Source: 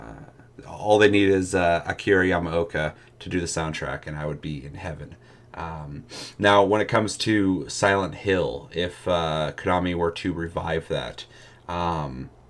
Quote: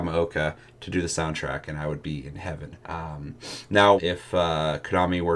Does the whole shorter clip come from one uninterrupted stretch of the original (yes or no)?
no